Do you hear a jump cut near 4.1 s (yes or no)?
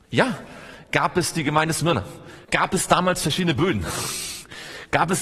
no